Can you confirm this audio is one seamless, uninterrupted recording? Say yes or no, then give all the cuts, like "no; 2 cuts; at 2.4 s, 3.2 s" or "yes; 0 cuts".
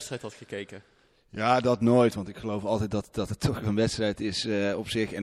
yes; 0 cuts